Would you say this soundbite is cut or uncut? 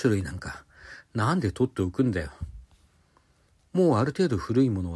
cut